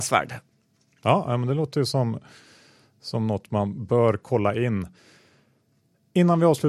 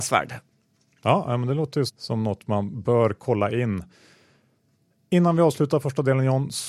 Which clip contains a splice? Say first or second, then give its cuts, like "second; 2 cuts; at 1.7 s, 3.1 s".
second; 1 cut; at 1.9 s